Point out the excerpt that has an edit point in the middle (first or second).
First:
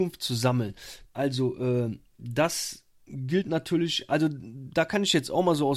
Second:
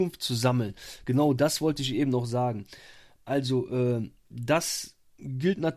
first